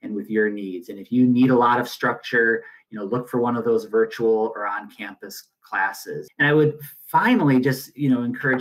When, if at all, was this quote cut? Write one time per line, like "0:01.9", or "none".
0:06.3